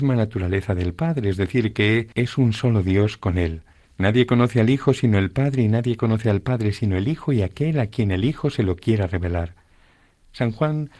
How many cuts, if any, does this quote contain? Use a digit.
2